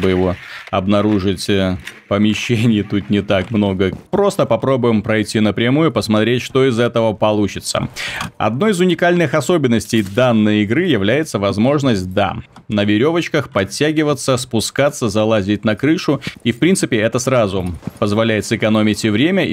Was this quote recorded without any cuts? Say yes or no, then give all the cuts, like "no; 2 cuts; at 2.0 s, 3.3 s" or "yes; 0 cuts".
no; 1 cut; at 4.1 s